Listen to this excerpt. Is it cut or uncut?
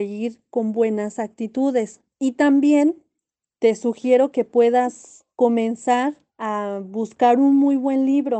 cut